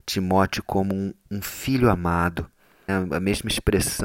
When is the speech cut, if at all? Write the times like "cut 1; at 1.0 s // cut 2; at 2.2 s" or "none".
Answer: cut 1; at 2.9 s

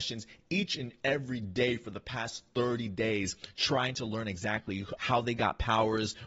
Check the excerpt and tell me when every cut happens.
cut 1; at 5.0 s

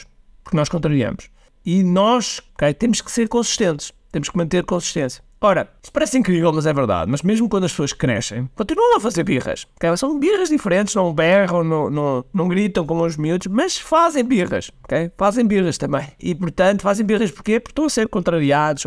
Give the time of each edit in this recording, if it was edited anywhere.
cut 1; at 2.5 s

